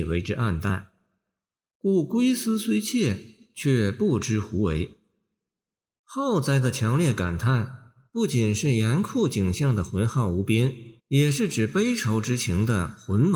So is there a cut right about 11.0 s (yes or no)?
yes